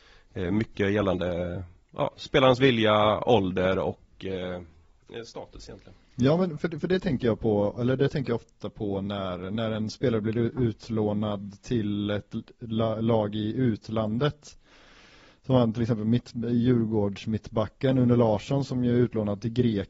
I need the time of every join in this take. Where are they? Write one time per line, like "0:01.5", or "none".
none